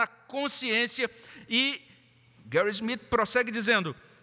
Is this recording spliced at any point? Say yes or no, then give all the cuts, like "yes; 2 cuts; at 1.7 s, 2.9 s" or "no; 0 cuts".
no; 0 cuts